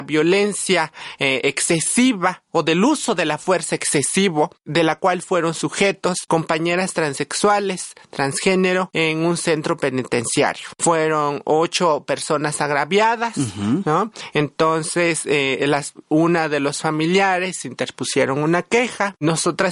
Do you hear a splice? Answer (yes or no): no